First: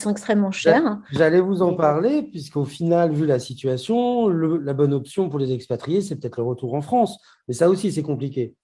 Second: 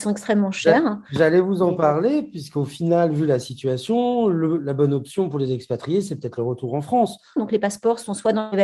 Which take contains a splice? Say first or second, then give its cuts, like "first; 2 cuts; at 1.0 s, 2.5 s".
second; 1 cut; at 7.4 s